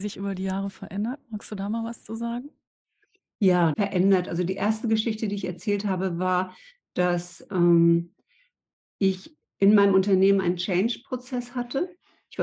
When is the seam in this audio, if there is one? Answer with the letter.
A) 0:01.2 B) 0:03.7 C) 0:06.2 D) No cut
B